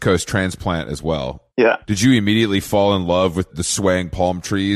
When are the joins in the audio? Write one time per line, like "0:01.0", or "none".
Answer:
0:01.5
0:03.5